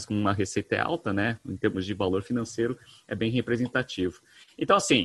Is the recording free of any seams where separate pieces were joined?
yes; 0 cuts

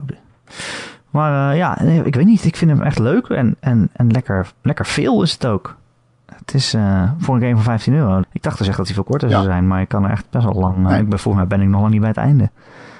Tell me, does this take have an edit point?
yes; 1 cut; at 8.2 s

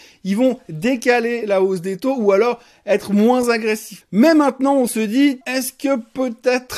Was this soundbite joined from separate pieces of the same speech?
yes; 2 cuts; at 4.0 s, 5.4 s

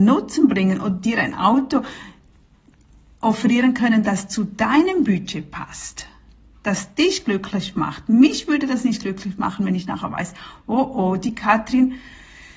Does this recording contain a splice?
no; 0 cuts

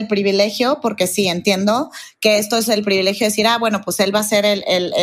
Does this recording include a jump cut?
no; 0 cuts

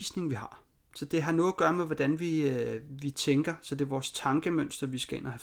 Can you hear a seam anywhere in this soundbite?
no; 0 cuts

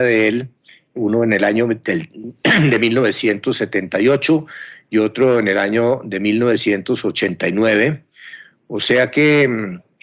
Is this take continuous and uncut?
yes; 0 cuts

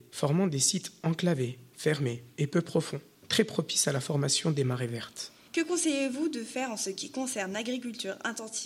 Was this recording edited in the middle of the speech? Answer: yes; 1 cut; at 5.5 s

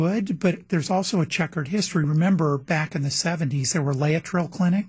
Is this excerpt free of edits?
yes; 0 cuts

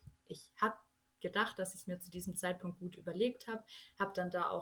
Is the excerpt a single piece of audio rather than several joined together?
yes; 0 cuts

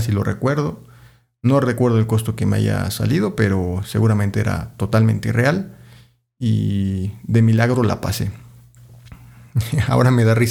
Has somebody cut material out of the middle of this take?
no; 0 cuts

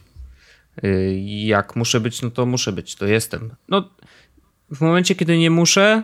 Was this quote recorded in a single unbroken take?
no; 1 cut; at 3.6 s

